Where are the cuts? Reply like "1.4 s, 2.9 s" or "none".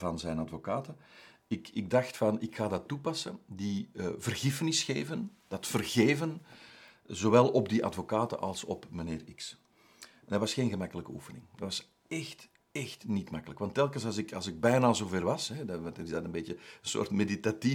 none